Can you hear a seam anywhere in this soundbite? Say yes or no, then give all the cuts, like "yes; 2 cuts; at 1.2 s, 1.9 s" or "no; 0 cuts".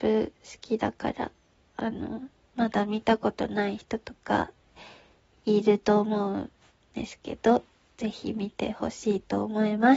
no; 0 cuts